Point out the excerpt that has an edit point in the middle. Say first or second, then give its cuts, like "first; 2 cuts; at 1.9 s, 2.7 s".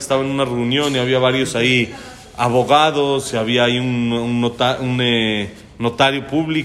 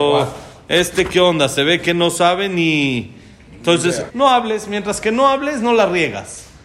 second; 1 cut; at 4.1 s